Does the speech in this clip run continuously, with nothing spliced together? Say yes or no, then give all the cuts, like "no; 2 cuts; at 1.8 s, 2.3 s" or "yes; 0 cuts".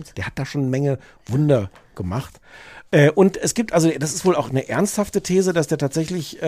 yes; 0 cuts